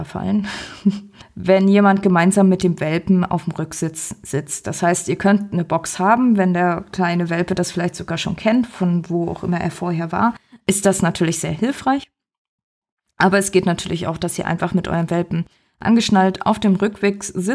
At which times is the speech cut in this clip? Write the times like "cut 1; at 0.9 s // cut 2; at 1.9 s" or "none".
none